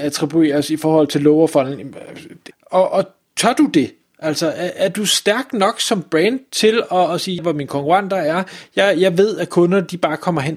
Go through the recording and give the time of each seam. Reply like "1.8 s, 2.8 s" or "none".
2.5 s, 7.4 s